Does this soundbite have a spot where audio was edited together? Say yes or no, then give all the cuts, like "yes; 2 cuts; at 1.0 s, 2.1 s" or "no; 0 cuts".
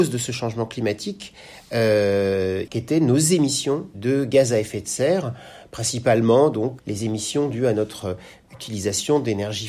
yes; 3 cuts; at 2.7 s, 3.9 s, 6.8 s